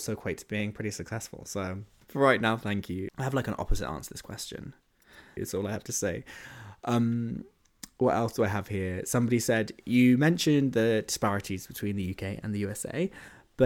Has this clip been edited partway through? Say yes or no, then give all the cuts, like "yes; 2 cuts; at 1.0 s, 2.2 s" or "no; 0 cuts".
yes; 2 cuts; at 3.1 s, 5.4 s